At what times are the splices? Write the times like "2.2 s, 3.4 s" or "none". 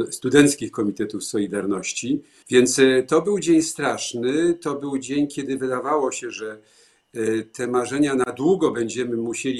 2.4 s